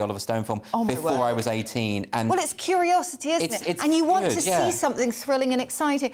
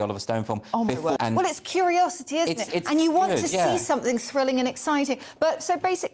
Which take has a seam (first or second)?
second